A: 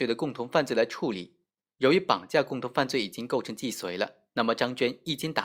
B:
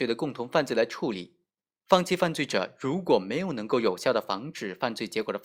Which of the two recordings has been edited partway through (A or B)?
B